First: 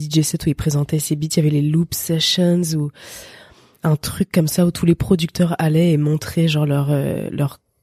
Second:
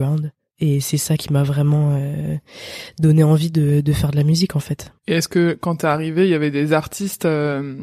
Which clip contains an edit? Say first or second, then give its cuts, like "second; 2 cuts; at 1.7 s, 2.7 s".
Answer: second; 1 cut; at 5.0 s